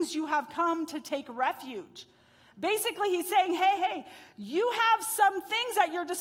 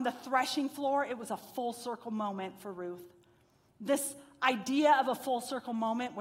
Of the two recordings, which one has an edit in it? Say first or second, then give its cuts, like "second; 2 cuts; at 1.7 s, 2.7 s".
first; 1 cut; at 3.8 s